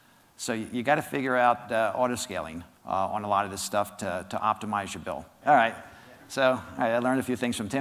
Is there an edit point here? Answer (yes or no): yes